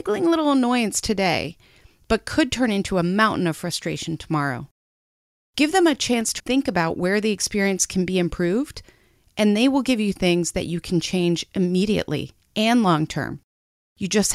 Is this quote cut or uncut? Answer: cut